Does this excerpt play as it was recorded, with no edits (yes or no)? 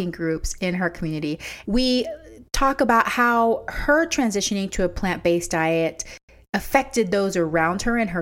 no